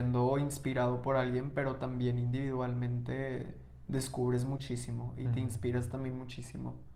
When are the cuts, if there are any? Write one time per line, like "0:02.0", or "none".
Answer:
none